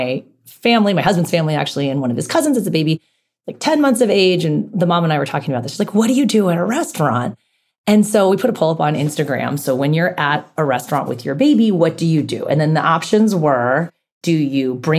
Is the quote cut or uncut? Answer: uncut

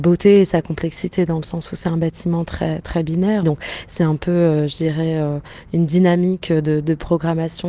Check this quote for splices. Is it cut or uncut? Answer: cut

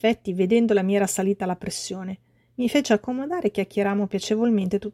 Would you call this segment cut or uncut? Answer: uncut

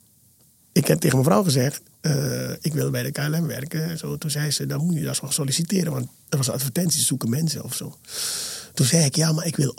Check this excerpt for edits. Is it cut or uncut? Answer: uncut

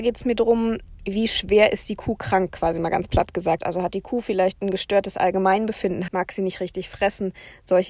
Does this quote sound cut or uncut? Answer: cut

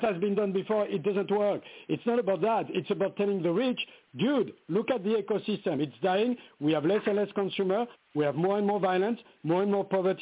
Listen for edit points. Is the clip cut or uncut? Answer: uncut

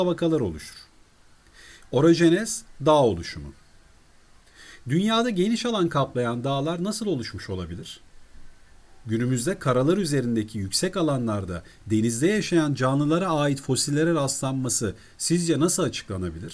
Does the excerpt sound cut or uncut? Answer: cut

